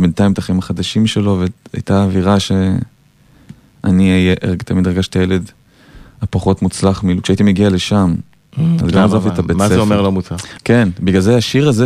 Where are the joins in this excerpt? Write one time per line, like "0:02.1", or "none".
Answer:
0:08.8
0:10.6